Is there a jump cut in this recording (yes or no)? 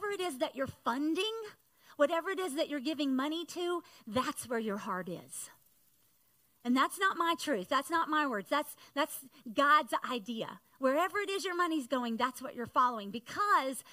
no